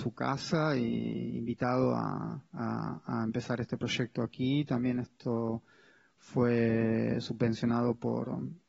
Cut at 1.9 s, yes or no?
no